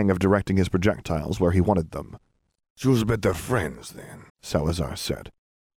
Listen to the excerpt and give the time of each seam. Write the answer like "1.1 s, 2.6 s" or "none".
2.7 s, 4.3 s